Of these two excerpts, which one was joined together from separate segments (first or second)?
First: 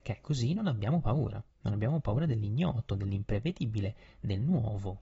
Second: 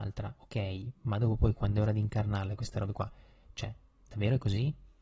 first